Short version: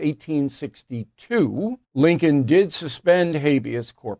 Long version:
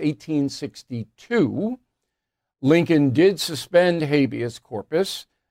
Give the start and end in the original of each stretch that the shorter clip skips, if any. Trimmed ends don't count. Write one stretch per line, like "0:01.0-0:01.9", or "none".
0:01.8-0:02.5